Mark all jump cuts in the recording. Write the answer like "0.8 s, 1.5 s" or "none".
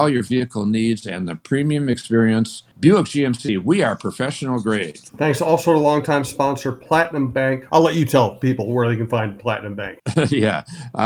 2.7 s, 7.7 s